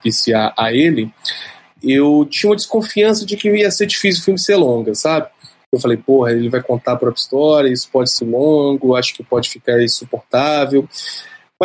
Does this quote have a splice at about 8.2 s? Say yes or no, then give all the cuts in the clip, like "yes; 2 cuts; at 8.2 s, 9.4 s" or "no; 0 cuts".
yes; 1 cut; at 8.2 s